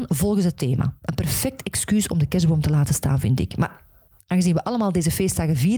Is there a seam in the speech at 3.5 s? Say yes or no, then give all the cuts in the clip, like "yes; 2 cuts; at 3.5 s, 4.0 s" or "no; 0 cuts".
no; 0 cuts